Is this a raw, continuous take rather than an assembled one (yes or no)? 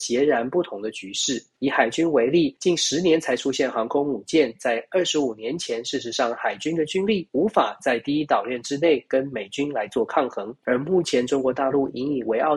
no